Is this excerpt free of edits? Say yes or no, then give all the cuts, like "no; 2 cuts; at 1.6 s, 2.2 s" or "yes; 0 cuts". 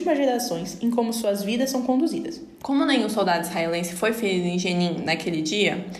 no; 1 cut; at 2.6 s